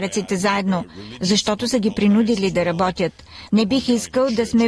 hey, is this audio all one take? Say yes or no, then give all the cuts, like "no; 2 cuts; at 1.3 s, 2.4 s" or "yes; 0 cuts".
no; 1 cut; at 3.5 s